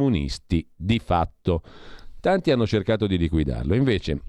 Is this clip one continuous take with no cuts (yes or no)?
yes